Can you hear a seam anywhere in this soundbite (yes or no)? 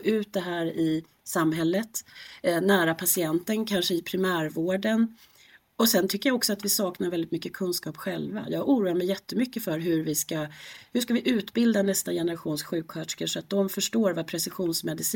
no